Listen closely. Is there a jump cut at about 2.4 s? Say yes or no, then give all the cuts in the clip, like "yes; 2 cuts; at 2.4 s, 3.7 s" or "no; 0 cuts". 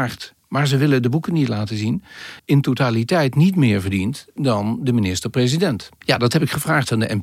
yes; 2 cuts; at 2.4 s, 6.0 s